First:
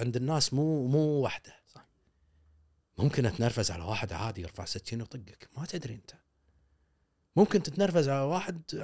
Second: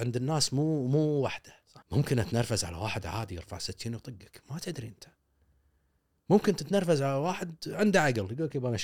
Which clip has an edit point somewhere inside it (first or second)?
second